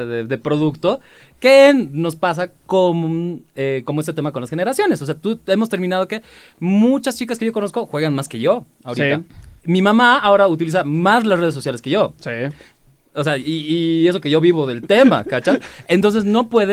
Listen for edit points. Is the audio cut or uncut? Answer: uncut